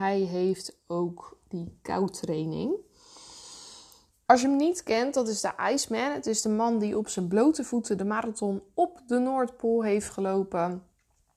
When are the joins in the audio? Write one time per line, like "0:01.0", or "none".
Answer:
0:04.3